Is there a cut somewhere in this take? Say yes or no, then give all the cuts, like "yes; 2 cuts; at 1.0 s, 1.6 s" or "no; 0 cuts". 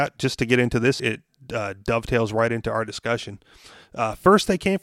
yes; 1 cut; at 1.0 s